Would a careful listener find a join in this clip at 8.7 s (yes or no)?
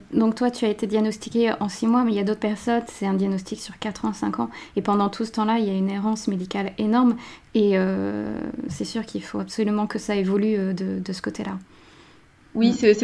yes